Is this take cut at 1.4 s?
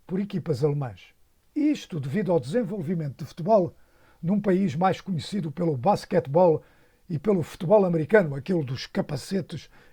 yes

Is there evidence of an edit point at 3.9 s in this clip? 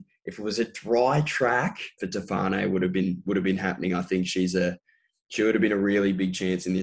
no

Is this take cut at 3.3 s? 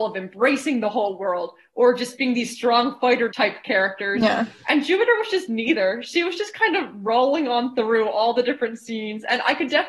yes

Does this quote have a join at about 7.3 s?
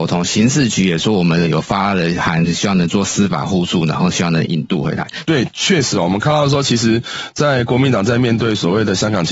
no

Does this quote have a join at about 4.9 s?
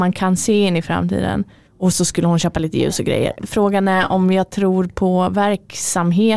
no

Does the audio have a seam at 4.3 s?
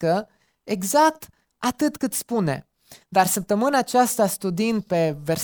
no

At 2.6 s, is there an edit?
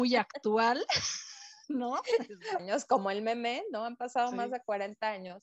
yes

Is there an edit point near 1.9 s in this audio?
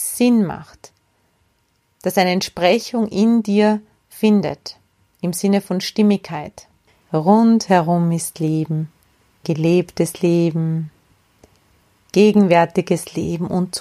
no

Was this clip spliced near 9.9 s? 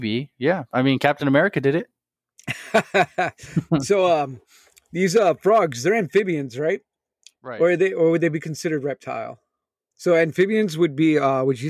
yes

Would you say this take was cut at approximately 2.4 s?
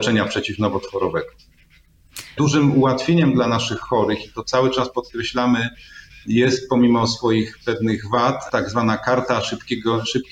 yes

